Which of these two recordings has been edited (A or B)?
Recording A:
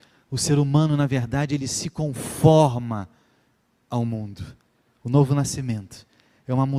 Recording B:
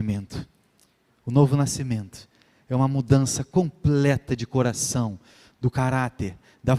B